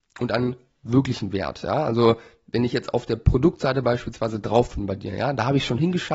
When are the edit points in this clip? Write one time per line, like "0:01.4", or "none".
none